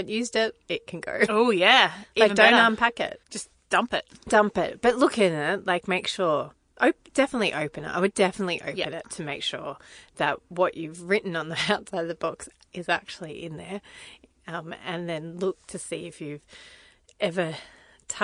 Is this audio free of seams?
no; 1 cut; at 3.2 s

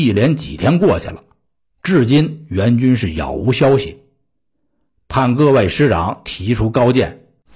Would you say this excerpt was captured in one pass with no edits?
yes; 0 cuts

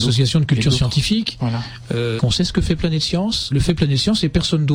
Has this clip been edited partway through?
yes; 2 cuts; at 2.2 s, 3.5 s

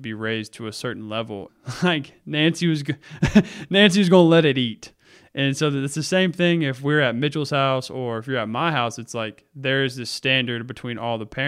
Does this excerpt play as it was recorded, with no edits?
no; 1 cut; at 1.5 s

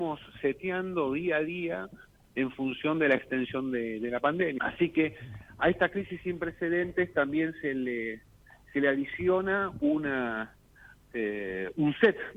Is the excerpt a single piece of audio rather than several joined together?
no; 1 cut; at 4.6 s

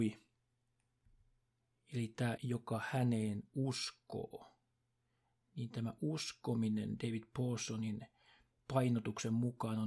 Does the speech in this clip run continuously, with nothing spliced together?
no; 1 cut; at 2.4 s

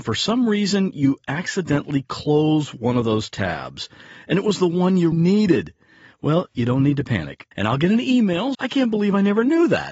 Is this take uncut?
no; 3 cuts; at 5.1 s, 7.5 s, 8.5 s

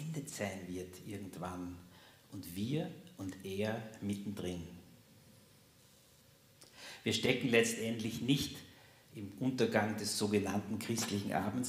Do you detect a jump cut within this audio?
no; 0 cuts

